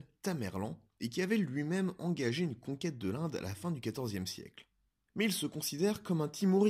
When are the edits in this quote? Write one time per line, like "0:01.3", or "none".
0:05.1